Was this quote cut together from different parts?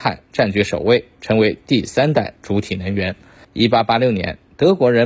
yes; 1 cut; at 3.4 s

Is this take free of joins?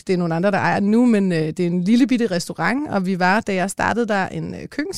yes; 0 cuts

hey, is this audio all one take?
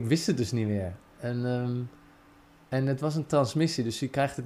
yes; 0 cuts

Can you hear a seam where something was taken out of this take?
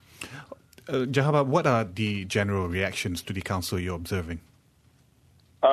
no; 0 cuts

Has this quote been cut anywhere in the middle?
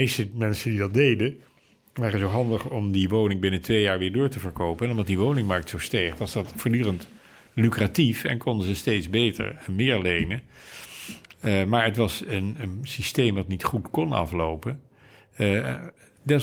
no; 0 cuts

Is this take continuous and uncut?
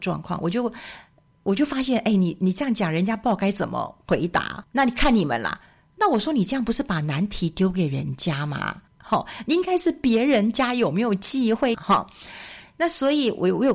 no; 3 cuts; at 4.6 s, 8.9 s, 11.7 s

